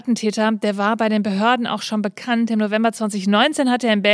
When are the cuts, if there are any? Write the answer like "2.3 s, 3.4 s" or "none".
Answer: none